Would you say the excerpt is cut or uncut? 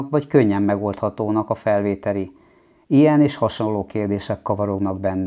uncut